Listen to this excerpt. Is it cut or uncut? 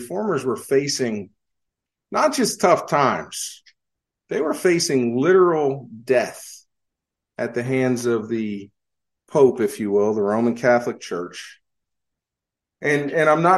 uncut